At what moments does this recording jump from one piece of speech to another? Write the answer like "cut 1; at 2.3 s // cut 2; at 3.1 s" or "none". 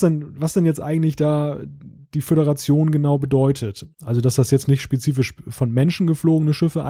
cut 1; at 3.9 s